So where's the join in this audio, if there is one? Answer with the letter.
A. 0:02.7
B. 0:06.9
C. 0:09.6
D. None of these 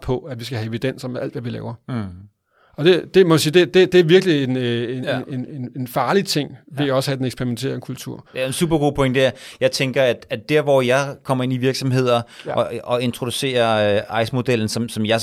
D